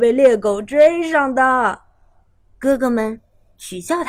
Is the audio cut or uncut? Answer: cut